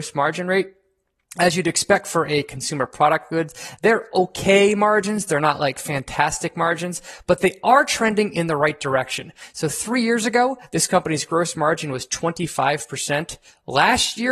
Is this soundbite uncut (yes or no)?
yes